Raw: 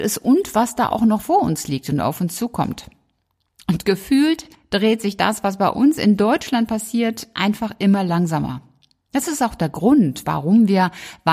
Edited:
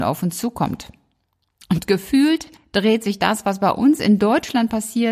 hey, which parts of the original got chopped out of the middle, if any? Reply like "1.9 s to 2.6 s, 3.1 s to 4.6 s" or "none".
none